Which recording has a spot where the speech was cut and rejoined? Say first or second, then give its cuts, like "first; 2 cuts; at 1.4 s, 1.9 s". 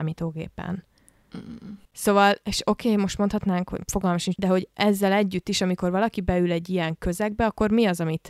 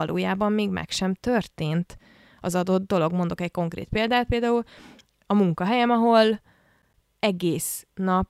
first; 2 cuts; at 1.8 s, 4.4 s